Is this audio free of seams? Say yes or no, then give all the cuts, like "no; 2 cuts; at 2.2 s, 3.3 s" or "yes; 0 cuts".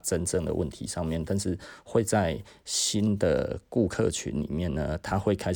yes; 0 cuts